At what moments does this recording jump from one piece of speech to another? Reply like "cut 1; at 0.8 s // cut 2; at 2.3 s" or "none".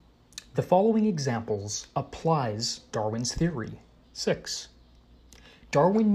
cut 1; at 4.0 s